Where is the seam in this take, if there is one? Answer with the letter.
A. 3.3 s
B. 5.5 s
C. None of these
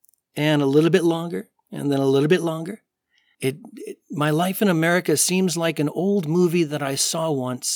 A